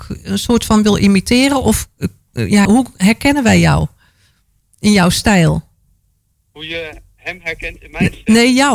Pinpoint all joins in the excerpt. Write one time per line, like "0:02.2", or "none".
0:02.6

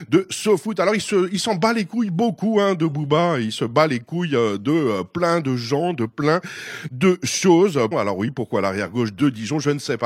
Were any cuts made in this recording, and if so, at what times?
0:07.9

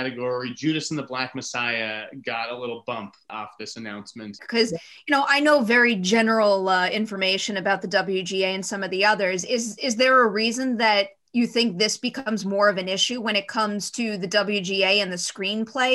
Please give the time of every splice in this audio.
0:04.4

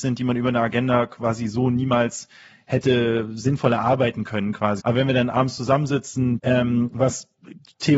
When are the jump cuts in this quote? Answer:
0:04.8
0:06.4

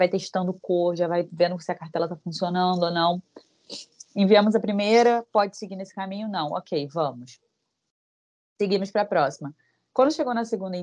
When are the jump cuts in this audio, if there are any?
none

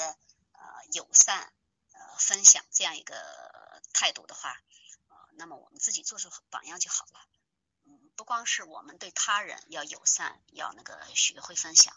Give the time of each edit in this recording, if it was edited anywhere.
none

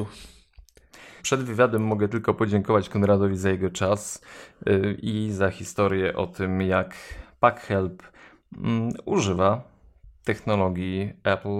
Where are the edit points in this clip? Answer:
0:01.2

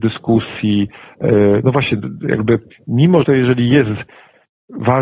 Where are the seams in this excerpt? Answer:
0:03.2

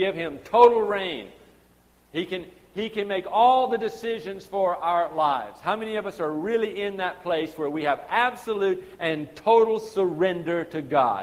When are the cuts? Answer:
none

